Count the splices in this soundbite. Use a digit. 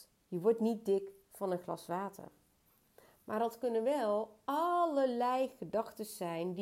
0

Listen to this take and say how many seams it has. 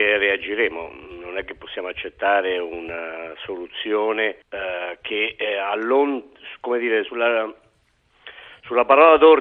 2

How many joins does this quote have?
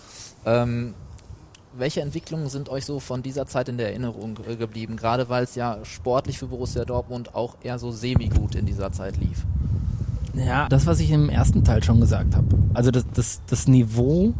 2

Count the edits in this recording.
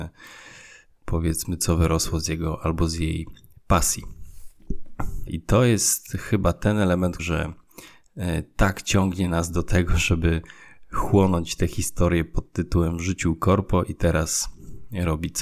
2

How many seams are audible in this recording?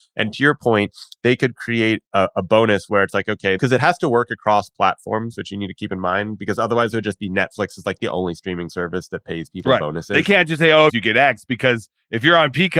2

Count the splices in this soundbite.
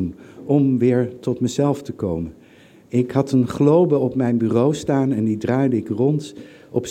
0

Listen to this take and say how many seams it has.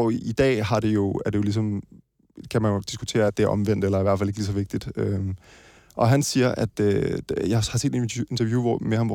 0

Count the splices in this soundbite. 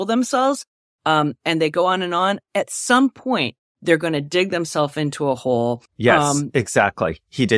1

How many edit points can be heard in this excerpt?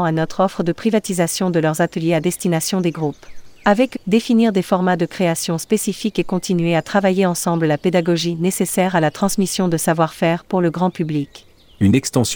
1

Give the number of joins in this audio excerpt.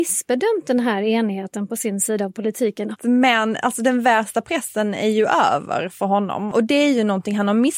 2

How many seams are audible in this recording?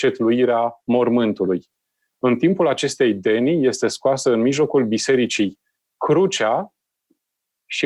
0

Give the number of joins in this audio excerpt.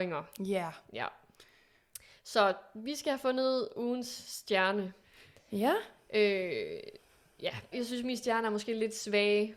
1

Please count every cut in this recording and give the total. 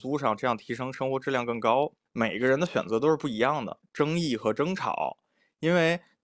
2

